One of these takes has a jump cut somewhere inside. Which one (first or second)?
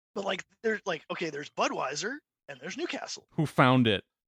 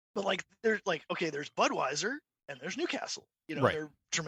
first